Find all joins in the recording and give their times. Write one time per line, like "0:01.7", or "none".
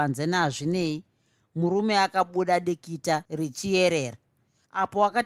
none